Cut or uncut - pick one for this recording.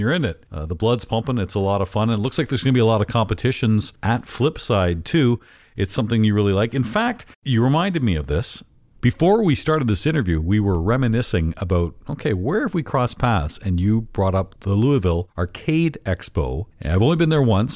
cut